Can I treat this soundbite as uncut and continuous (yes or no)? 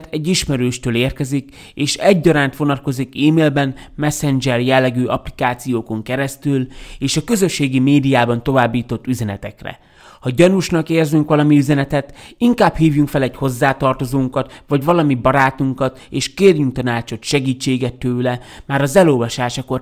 yes